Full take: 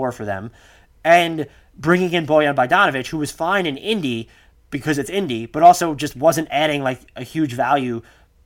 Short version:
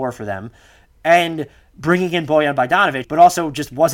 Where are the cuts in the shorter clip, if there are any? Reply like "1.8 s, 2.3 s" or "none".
3.0 s